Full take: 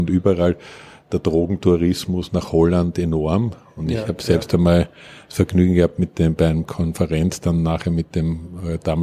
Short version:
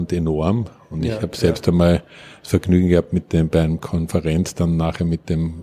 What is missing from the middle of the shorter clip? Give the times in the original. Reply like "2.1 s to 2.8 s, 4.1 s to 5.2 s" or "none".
none